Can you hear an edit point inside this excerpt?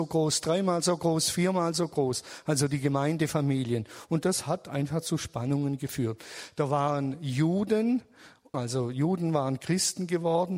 yes; 1 cut; at 8.5 s

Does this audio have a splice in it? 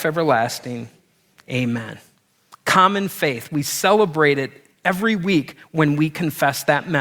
no; 0 cuts

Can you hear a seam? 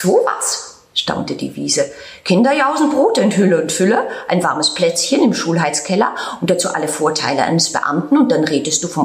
no; 0 cuts

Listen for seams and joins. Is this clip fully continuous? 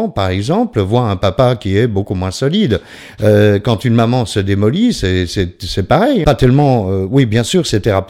no; 1 cut; at 6.2 s

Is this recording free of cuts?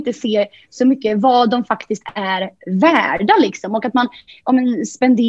yes; 0 cuts

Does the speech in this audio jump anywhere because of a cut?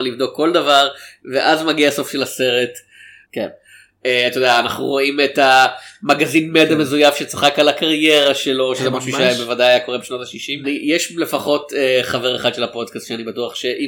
yes; 2 cuts; at 3.2 s, 10.6 s

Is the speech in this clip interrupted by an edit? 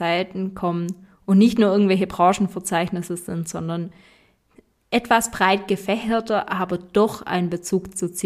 no; 0 cuts

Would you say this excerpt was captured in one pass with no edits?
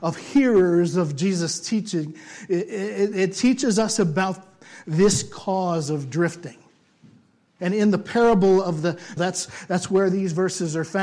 no; 2 cuts; at 7.6 s, 9.2 s

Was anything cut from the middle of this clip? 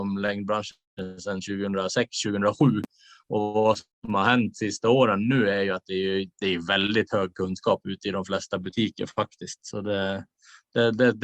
no; 0 cuts

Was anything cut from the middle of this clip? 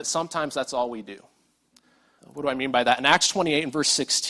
yes; 1 cut; at 2.2 s

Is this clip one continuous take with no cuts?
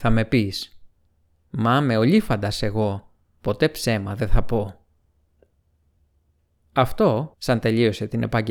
no; 1 cut; at 7.3 s

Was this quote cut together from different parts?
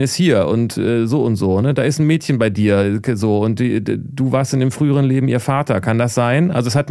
no; 0 cuts

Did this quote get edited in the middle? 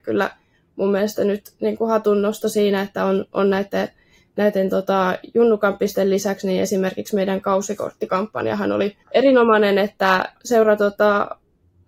yes; 2 cuts; at 9.0 s, 10.4 s

